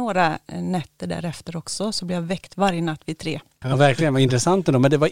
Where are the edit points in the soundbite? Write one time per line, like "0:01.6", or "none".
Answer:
0:03.6